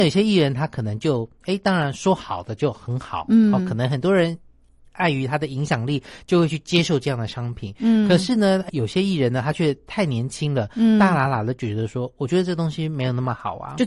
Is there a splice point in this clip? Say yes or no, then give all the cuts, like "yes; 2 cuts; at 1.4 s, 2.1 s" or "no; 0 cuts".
yes; 1 cut; at 8.7 s